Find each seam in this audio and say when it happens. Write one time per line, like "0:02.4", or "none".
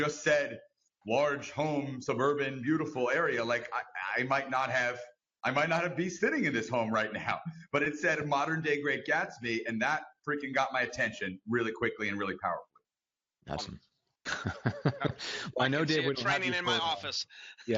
0:13.6